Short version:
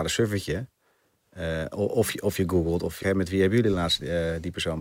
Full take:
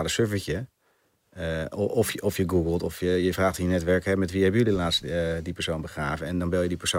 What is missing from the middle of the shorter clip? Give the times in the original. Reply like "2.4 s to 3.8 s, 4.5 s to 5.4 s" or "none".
3.0 s to 4.0 s